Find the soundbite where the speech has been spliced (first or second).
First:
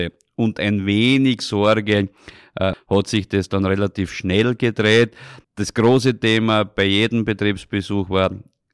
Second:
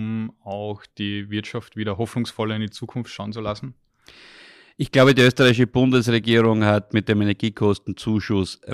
first